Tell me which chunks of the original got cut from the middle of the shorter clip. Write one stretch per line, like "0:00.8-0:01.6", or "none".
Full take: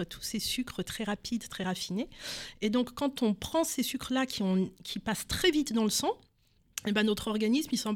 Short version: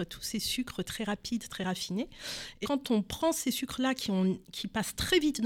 0:02.6-0:02.9

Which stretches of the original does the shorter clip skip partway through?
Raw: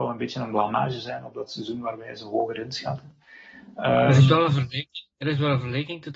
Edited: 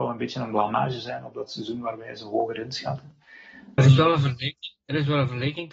0:03.8-0:04.1

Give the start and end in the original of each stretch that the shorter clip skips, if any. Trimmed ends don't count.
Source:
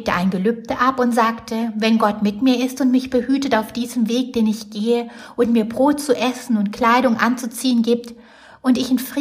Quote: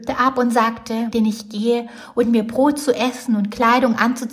0:01.7-0:04.3

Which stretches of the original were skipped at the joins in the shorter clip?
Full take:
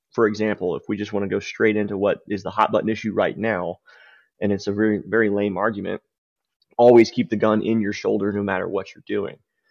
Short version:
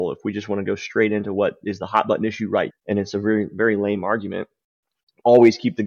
0:03.3-0:04.2

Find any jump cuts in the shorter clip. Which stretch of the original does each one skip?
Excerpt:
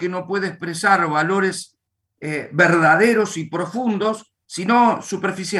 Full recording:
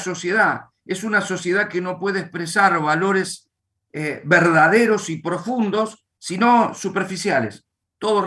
none

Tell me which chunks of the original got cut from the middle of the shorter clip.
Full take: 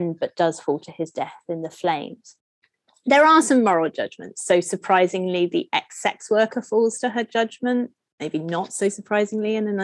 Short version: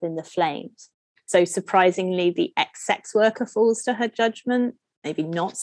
0:02.7-0:04.4

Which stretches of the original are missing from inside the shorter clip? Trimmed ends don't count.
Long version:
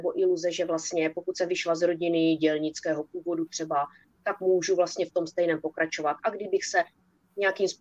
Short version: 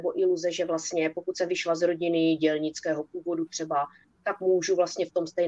none

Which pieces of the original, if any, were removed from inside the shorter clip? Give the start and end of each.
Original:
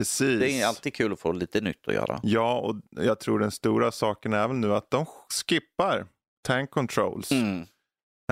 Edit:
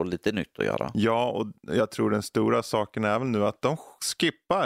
none

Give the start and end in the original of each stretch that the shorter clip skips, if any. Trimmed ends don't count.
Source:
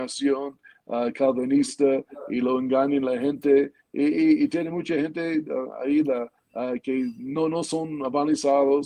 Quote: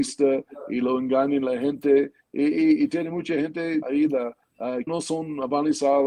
0:05.4-0:05.8
0:06.8-0:07.5

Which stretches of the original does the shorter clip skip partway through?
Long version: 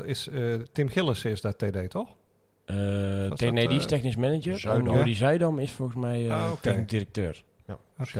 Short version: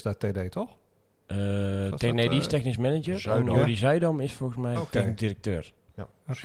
0:06.1-0:06.5

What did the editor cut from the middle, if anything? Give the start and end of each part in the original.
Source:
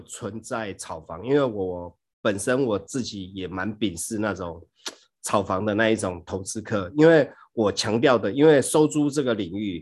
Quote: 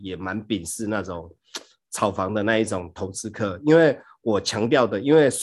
none

